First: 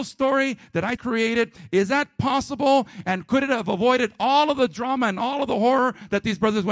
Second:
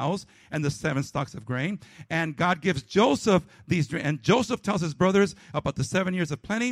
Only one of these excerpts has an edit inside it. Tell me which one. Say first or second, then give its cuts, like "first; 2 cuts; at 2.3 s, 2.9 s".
first; 1 cut; at 1.0 s